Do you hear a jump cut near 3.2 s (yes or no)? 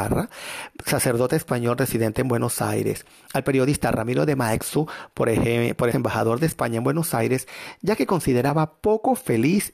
no